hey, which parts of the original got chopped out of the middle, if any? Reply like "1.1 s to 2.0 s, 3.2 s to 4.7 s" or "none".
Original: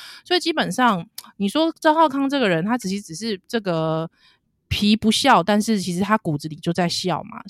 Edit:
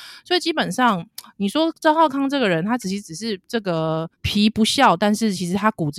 4.1 s to 4.6 s